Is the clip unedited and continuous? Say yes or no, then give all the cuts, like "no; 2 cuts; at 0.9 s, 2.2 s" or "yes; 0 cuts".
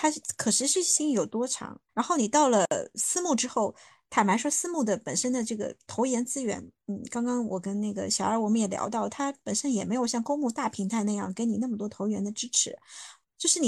no; 1 cut; at 1.9 s